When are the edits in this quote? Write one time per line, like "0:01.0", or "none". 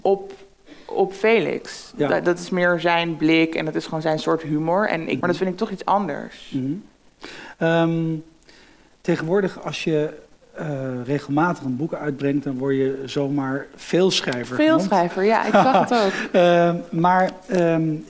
0:05.2